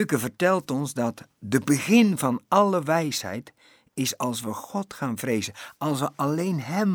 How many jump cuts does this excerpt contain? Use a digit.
1